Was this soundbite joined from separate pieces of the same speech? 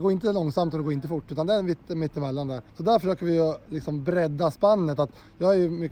yes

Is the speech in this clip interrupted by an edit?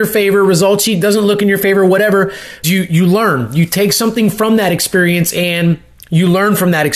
yes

